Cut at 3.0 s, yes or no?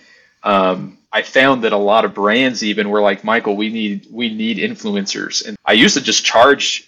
no